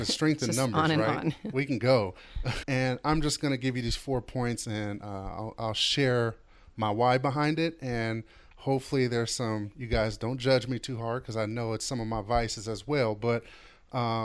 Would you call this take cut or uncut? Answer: cut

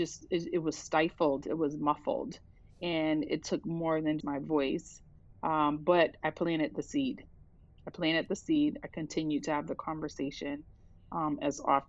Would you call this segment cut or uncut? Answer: cut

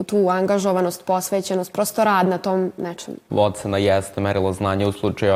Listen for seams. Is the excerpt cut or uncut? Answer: uncut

